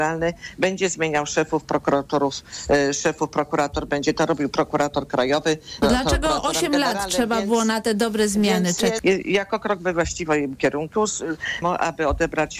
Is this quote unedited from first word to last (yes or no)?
no